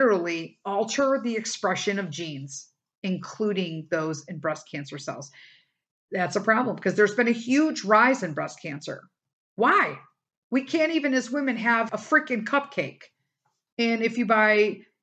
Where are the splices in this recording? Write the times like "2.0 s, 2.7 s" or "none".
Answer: 11.9 s, 13.7 s